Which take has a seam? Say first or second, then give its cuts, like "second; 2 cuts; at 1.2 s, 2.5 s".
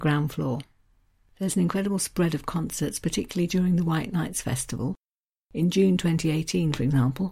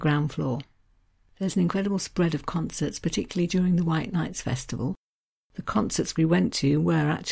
second; 1 cut; at 5.4 s